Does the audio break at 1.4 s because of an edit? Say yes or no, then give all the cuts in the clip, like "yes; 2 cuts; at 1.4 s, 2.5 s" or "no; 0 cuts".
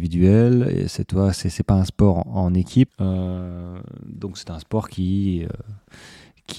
no; 1 cut; at 2.9 s